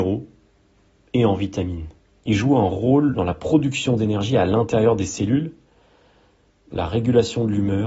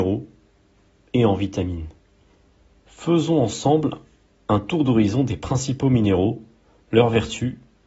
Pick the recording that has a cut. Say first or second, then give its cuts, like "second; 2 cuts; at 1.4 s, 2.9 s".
first; 2 cuts; at 2.2 s, 6.7 s